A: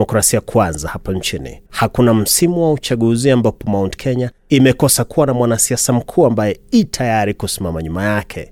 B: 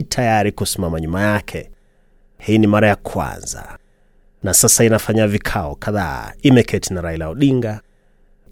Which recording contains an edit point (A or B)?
A